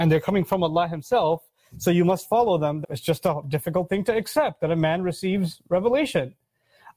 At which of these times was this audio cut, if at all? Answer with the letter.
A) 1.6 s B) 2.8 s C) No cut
B